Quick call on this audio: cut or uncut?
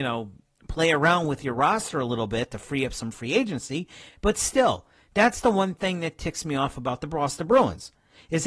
uncut